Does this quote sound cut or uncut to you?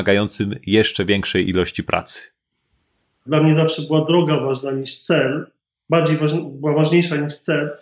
cut